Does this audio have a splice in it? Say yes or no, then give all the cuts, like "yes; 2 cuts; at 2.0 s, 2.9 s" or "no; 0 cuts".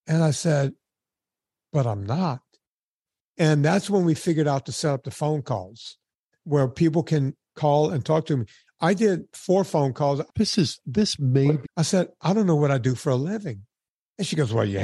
yes; 2 cuts; at 10.3 s, 11.6 s